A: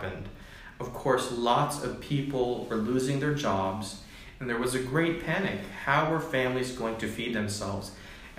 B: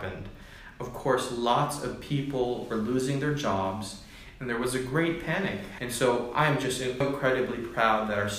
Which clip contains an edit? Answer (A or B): B